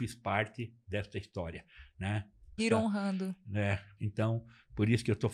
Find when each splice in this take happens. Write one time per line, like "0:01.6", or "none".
0:02.6
0:04.0